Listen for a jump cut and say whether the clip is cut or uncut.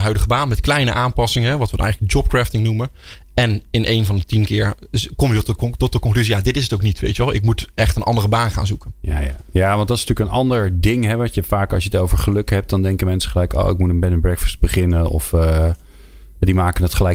uncut